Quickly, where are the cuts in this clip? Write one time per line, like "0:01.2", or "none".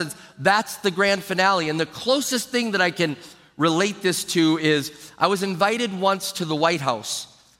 none